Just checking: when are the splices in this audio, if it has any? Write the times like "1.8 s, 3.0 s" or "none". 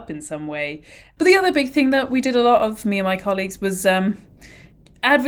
1.2 s